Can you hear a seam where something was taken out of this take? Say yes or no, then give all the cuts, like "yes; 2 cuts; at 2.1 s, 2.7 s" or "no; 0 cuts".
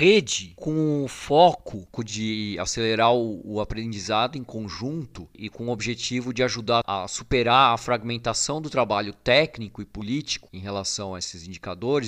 no; 0 cuts